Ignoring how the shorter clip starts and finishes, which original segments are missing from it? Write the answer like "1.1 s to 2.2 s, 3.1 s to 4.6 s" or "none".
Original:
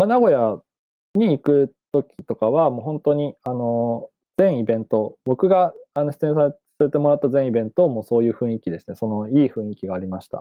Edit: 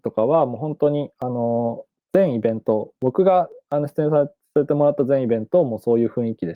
none